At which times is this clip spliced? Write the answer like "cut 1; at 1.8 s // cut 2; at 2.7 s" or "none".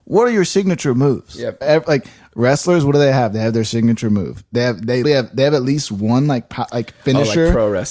cut 1; at 1.6 s // cut 2; at 5.0 s

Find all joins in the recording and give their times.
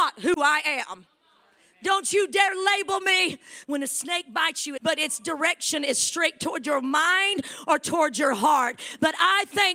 cut 1; at 3.6 s // cut 2; at 4.8 s

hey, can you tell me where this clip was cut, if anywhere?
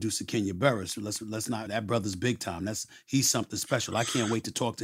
cut 1; at 1.7 s

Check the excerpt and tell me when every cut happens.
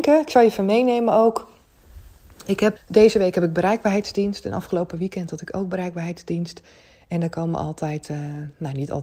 cut 1; at 2.8 s

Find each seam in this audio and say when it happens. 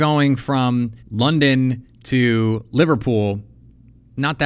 cut 1; at 1.0 s

